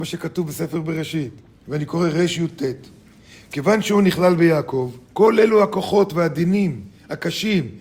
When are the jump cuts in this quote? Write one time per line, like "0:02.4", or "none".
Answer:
0:01.5
0:05.0